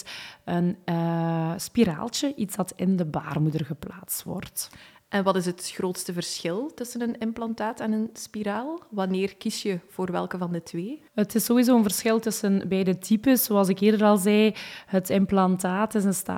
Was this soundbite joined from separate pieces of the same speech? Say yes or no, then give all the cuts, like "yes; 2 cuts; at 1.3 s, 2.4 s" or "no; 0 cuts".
yes; 1 cut; at 11.1 s